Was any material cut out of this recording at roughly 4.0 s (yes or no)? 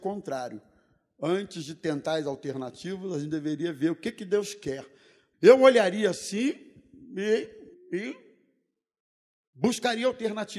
no